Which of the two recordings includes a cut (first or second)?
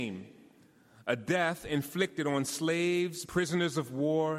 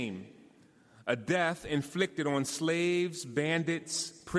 first